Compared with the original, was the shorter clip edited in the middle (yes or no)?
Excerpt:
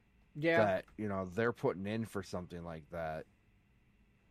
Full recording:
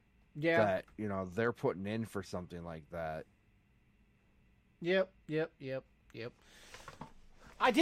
no